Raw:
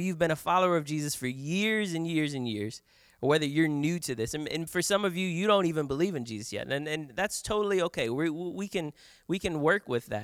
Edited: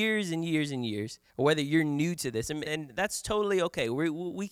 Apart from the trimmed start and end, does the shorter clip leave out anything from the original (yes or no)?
yes